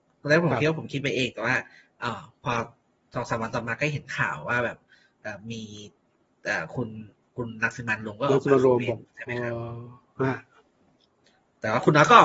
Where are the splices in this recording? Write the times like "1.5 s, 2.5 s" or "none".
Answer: 9.1 s